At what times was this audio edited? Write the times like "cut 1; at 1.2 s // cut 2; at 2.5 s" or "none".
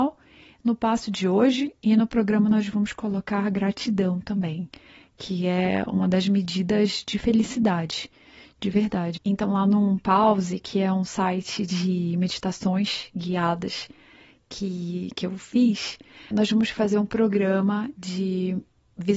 cut 1; at 9.2 s // cut 2; at 16.3 s